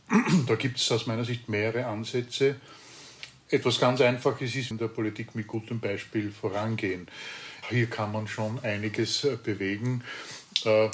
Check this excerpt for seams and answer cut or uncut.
cut